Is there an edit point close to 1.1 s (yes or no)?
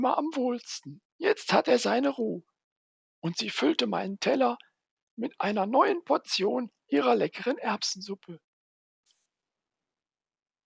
yes